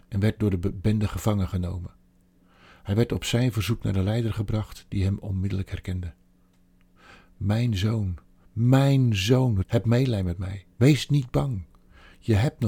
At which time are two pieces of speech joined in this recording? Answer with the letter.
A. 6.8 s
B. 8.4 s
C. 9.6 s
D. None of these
C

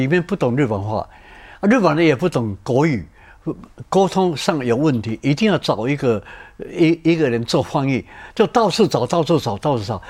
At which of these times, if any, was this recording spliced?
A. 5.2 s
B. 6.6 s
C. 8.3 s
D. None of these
D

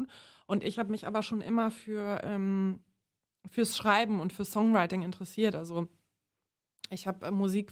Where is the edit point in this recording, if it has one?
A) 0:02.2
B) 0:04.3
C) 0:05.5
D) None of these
C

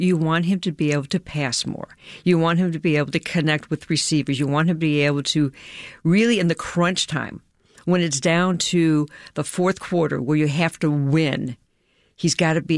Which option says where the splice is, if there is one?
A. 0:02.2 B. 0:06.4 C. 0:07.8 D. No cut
D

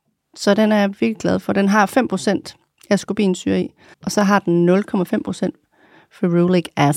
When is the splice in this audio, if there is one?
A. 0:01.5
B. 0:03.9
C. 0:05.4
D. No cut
B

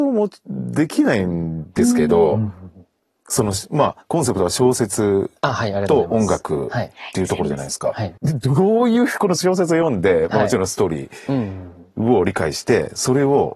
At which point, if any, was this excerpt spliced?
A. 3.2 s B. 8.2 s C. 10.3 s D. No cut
B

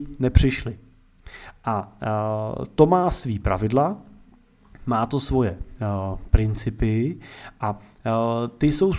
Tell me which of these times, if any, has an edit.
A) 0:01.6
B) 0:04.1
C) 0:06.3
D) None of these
D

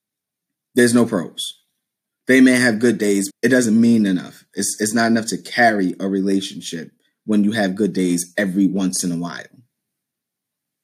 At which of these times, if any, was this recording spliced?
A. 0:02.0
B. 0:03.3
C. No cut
B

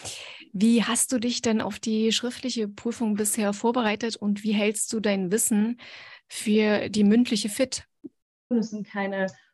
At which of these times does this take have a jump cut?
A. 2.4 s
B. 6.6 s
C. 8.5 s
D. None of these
C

